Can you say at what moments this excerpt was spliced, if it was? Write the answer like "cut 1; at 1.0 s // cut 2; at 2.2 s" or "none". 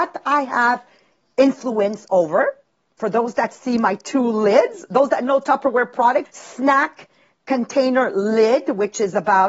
cut 1; at 6.2 s